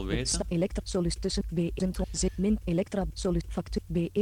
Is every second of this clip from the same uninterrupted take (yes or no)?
yes